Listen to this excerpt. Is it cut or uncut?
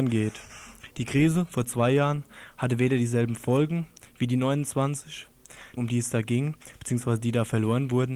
cut